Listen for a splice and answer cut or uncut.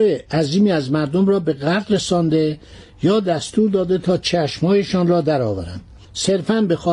uncut